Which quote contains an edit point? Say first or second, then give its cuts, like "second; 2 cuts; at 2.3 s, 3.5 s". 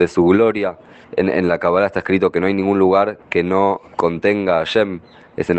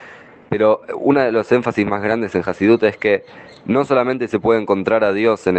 first; 2 cuts; at 1.0 s, 3.9 s